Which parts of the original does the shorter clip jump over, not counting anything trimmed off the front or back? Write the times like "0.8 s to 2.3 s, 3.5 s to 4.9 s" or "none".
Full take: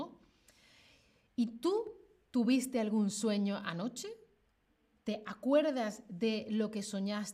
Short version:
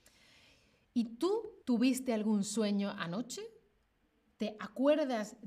2.0 s to 2.3 s